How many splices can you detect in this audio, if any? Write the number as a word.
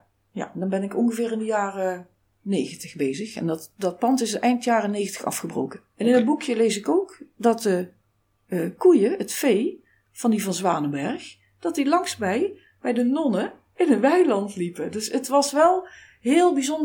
one